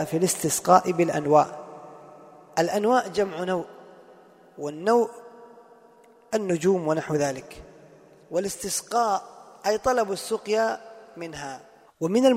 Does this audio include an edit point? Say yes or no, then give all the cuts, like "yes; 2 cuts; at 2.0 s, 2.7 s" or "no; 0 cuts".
no; 0 cuts